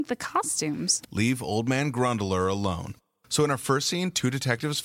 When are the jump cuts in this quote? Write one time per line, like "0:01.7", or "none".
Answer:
0:01.0